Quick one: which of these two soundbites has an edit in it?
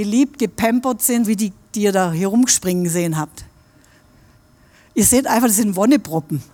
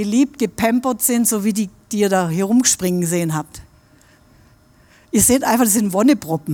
first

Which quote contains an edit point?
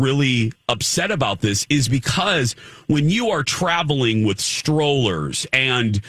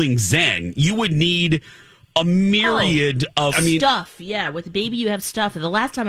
second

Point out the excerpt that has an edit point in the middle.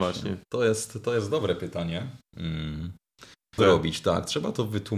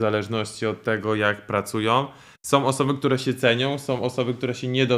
first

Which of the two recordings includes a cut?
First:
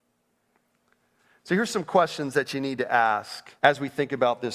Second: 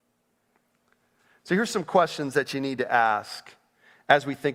first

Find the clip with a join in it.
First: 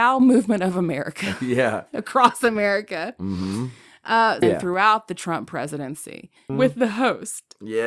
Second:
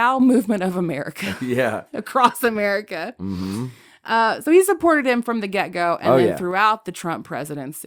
first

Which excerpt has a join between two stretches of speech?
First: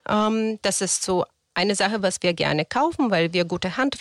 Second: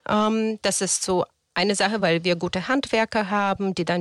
second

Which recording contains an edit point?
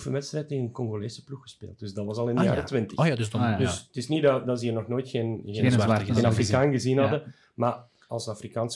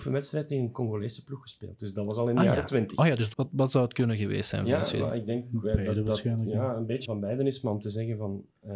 second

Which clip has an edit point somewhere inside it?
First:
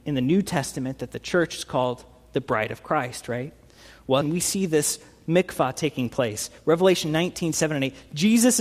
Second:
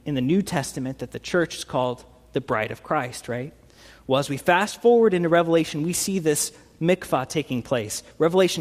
first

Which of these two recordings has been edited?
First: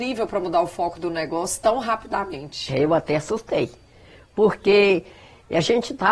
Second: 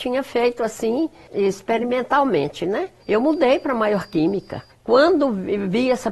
second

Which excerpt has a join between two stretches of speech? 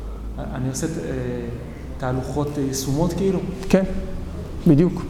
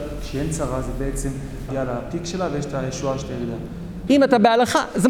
second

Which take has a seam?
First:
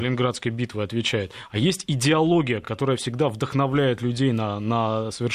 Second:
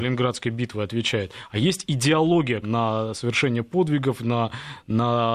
second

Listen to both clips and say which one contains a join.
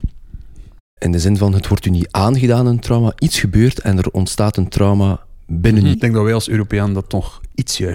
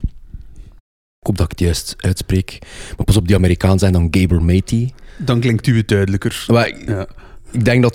first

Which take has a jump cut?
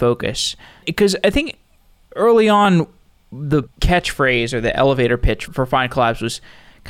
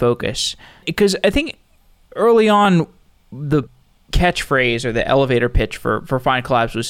first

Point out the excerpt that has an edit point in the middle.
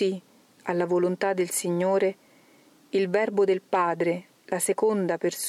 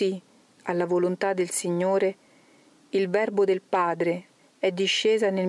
second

